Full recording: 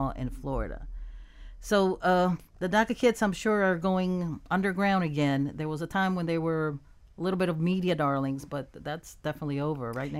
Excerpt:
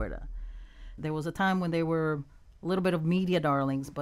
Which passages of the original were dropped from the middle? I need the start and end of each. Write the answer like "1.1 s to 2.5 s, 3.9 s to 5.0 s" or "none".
1.6 s to 5.5 s